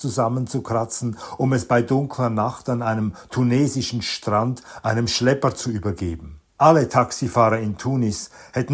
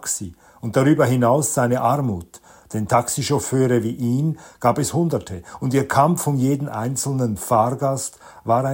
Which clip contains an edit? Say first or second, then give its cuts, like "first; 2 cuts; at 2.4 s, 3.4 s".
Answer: first; 1 cut; at 6.5 s